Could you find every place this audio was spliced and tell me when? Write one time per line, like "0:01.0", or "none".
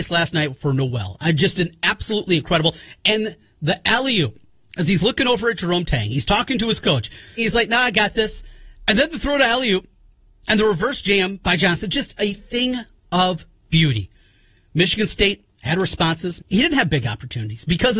0:07.4
0:16.4